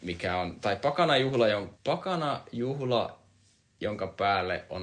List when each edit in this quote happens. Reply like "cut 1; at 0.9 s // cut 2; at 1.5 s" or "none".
cut 1; at 1.7 s